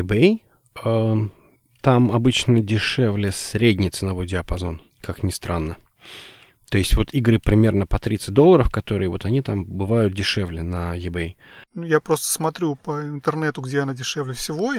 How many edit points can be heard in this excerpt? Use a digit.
2